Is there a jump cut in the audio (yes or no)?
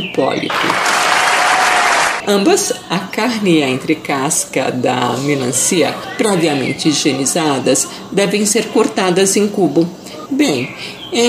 yes